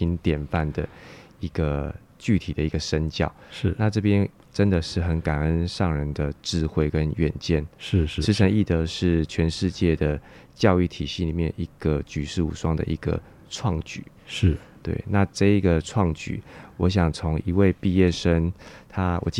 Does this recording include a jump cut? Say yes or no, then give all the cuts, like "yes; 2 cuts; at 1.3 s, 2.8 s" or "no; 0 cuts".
no; 0 cuts